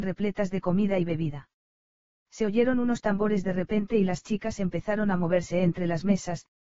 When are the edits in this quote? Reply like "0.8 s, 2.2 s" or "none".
2.2 s